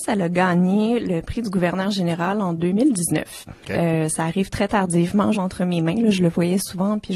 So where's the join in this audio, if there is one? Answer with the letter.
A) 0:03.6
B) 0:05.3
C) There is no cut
B